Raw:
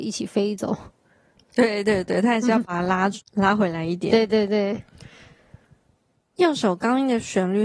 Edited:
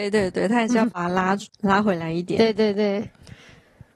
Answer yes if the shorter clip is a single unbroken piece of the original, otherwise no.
yes